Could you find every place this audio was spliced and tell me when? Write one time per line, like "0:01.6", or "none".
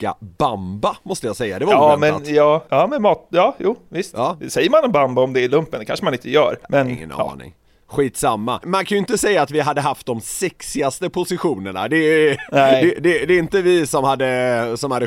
0:02.7
0:06.6

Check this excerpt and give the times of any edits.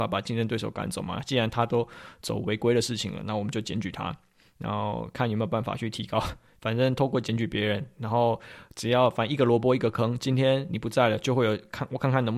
none

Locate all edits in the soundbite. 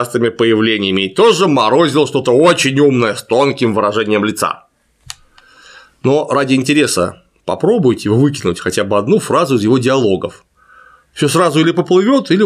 none

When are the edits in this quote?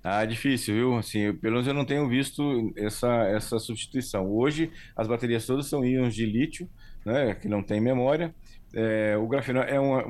none

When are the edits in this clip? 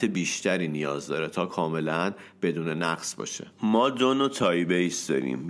0:03.5

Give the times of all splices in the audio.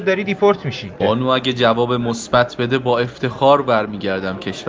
0:01.0

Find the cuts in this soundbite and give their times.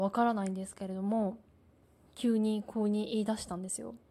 none

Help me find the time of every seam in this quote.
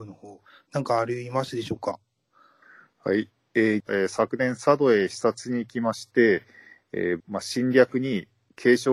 0:03.8
0:07.2

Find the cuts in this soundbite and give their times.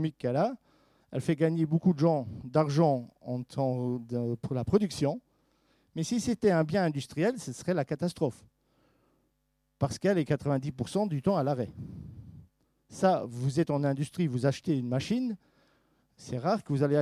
none

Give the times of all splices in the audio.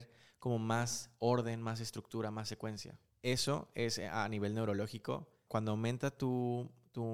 0:03.1
0:05.5

